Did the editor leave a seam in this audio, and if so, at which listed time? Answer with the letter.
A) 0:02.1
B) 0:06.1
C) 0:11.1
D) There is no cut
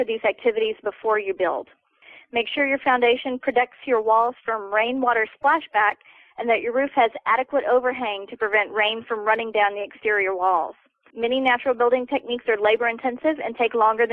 C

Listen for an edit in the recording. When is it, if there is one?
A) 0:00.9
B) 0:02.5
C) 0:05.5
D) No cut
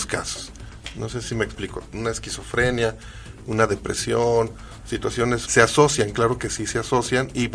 C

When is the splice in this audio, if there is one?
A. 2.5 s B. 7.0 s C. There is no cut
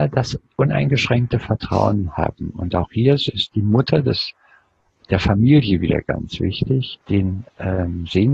B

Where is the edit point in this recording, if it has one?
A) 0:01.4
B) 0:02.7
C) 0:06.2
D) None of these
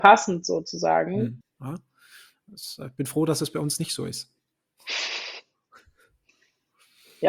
A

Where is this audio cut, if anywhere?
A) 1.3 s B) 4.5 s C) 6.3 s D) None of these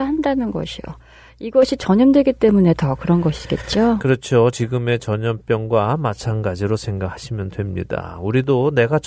D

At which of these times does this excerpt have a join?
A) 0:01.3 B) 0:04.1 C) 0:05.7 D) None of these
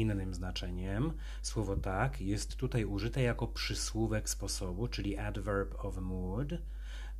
D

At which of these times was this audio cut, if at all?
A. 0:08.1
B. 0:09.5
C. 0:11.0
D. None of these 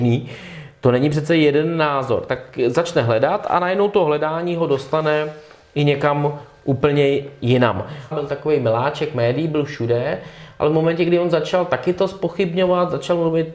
A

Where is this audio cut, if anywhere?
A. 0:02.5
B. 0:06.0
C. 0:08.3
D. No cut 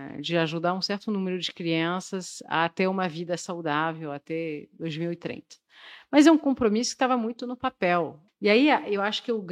C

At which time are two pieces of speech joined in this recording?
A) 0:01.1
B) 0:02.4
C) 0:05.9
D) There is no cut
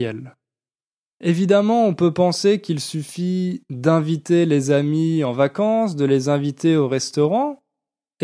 A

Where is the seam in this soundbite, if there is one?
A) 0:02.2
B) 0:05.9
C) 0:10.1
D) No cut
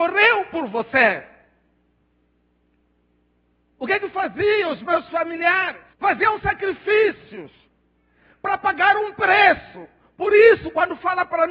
B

